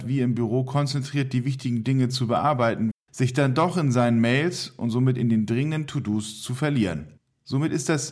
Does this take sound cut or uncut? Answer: cut